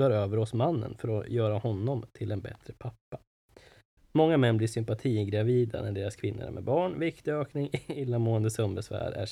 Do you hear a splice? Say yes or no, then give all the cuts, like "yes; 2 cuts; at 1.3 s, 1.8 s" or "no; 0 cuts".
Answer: no; 0 cuts